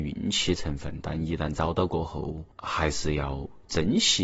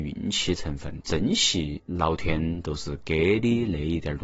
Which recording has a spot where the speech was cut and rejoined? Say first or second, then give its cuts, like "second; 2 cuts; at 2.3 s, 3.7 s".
second; 1 cut; at 1.0 s